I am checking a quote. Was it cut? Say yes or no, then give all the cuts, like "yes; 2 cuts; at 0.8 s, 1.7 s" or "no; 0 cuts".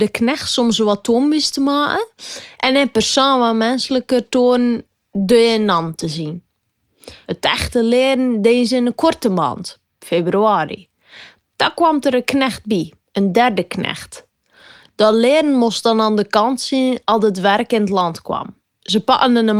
no; 0 cuts